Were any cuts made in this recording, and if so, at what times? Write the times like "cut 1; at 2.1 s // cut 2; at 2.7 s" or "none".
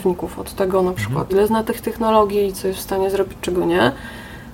cut 1; at 1.3 s